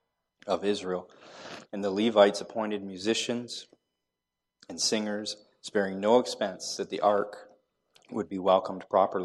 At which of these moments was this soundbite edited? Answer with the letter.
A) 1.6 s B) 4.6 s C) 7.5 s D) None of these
A